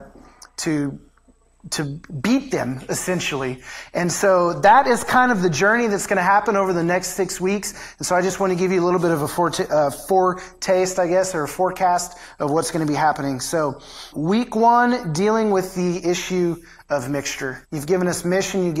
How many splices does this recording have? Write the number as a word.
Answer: two